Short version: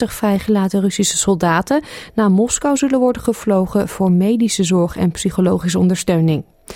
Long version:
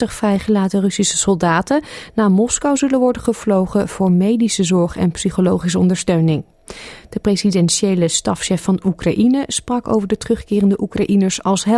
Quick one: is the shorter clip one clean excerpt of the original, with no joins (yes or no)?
yes